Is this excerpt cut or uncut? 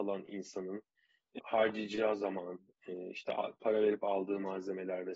cut